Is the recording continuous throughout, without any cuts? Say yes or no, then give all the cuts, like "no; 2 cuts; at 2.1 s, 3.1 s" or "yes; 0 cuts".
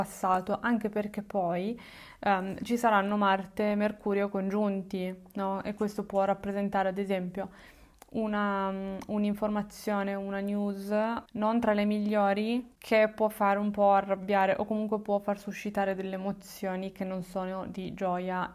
yes; 0 cuts